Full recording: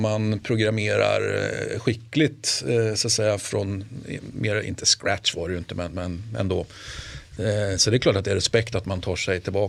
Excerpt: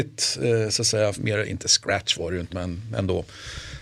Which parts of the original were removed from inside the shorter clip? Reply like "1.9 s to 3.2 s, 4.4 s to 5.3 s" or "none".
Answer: 3.4 s to 4.3 s, 5.7 s to 5.9 s